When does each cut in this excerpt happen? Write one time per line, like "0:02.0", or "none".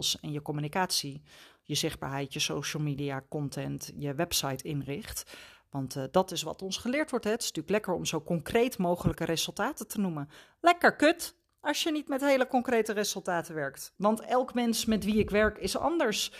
0:14.0